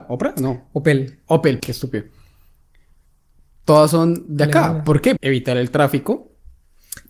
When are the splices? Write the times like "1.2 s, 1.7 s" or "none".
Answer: 1.6 s, 5.2 s